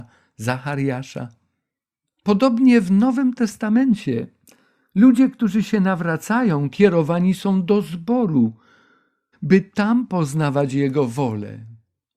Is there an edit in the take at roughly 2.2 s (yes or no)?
no